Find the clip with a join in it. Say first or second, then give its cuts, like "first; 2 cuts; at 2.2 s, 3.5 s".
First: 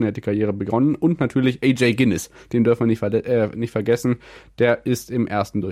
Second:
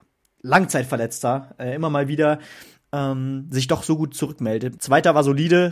second; 1 cut; at 4.7 s